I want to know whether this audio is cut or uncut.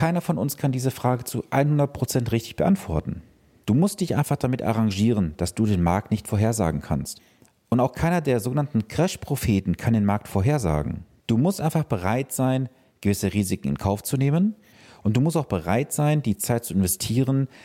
cut